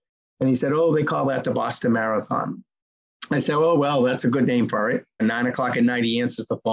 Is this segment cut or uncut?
cut